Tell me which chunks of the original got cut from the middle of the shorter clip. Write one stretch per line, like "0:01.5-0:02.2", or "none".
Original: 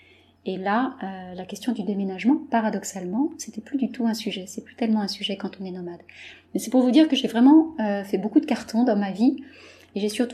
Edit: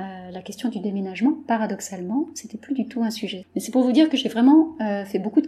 0:04.5-0:06.4